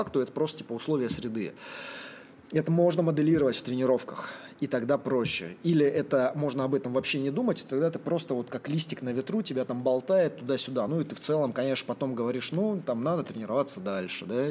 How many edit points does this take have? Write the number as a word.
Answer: zero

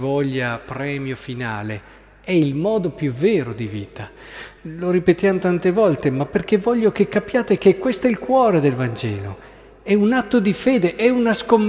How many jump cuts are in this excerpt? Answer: zero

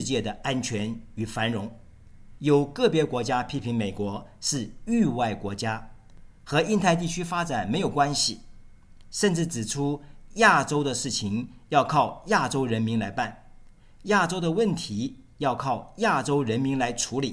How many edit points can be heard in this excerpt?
zero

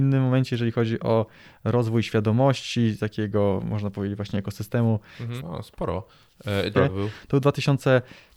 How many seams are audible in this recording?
two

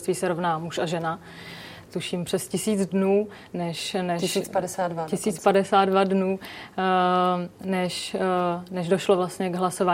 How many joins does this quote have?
one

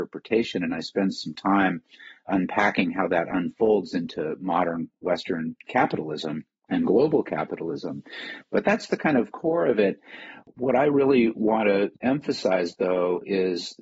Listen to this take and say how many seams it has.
zero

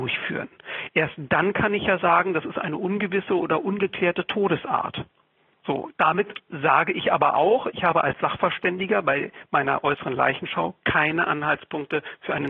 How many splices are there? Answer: zero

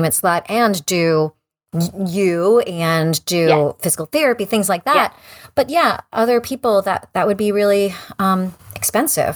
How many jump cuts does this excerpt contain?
zero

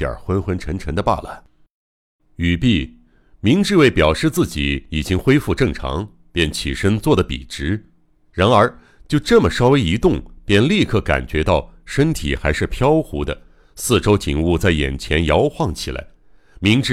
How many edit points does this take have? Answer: zero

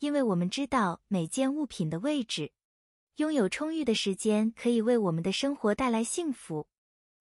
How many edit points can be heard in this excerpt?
zero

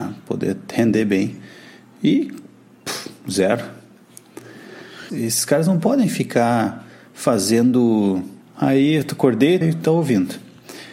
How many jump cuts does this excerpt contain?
three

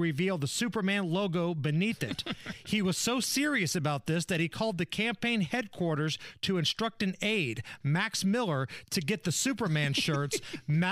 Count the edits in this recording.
zero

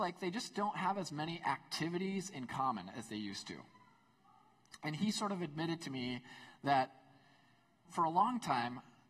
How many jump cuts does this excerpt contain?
one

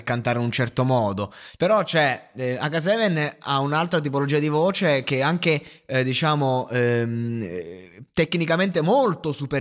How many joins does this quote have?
one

